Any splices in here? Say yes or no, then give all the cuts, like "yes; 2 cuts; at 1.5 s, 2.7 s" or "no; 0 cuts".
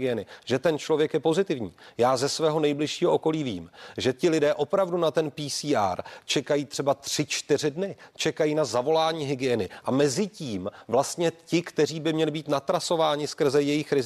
no; 0 cuts